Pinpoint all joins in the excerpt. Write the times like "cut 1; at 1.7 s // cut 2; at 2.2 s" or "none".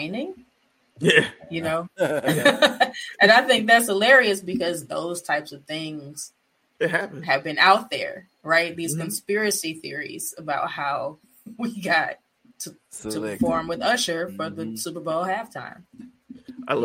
cut 1; at 12.5 s